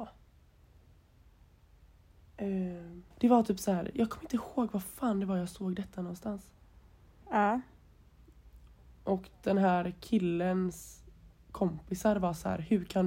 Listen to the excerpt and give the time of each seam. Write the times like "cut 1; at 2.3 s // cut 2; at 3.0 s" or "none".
cut 1; at 3.1 s // cut 2; at 7.2 s